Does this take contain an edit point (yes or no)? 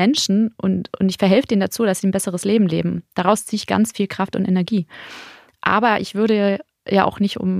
no